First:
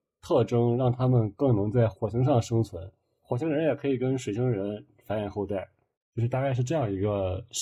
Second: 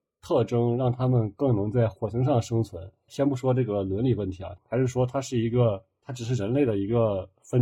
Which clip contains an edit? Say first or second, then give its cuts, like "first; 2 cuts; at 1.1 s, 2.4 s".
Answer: second; 2 cuts; at 3.1 s, 4.6 s